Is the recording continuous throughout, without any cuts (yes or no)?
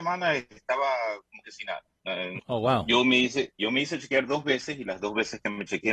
no